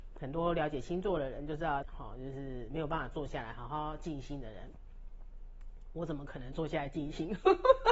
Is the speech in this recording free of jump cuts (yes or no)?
no